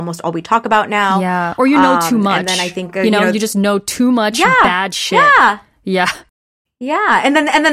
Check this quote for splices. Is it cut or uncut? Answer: uncut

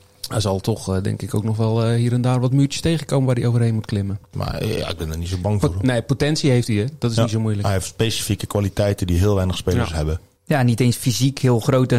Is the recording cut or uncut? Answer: cut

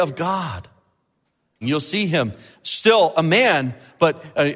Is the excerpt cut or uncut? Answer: cut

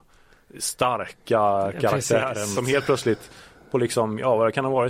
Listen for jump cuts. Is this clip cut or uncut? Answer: cut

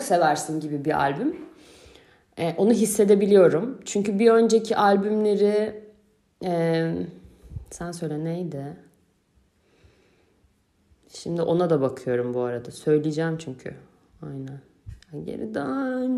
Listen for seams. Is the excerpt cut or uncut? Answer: uncut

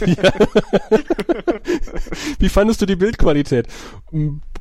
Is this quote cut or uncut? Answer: uncut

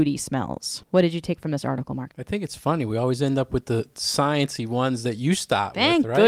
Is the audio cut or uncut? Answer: uncut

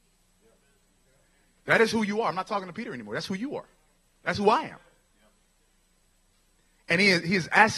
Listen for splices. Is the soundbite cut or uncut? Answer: uncut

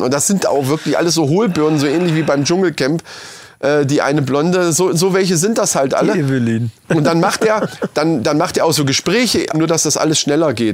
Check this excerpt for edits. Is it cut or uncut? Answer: cut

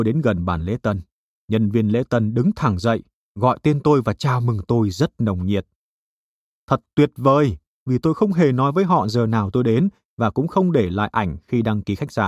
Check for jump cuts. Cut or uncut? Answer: uncut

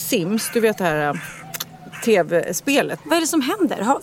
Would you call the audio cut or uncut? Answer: cut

